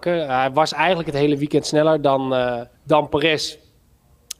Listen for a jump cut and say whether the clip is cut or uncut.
cut